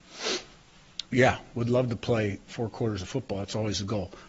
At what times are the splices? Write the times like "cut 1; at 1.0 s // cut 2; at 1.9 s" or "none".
cut 1; at 1.0 s // cut 2; at 2.5 s